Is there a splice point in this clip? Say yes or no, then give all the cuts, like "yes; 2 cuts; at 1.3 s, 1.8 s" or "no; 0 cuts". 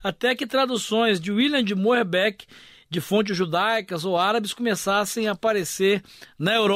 no; 0 cuts